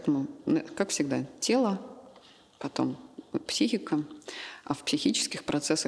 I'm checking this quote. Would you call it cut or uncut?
uncut